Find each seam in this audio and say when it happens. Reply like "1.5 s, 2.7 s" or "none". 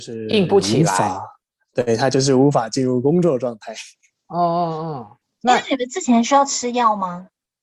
none

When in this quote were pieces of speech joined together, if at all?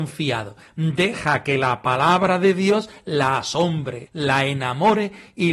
4.1 s

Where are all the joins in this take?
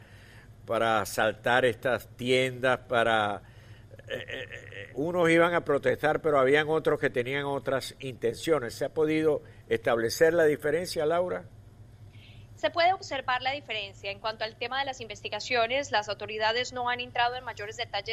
4.9 s

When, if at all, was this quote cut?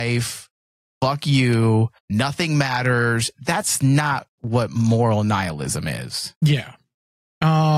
2.0 s

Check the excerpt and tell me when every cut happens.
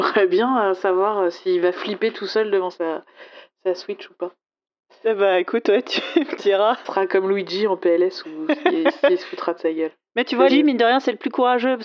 6.8 s, 10.5 s

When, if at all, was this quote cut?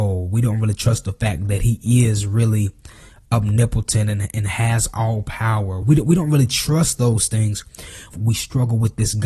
5.8 s, 8.1 s

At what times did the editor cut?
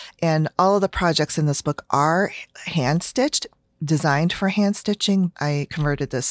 5.3 s

